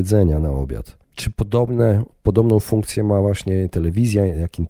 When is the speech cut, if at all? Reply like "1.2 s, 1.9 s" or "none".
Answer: none